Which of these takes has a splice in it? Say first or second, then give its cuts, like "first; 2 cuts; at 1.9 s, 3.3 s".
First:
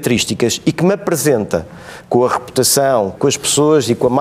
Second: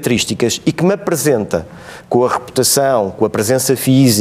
first; 1 cut; at 3.2 s